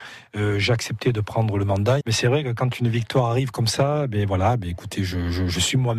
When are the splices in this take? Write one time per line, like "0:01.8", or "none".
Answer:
0:02.0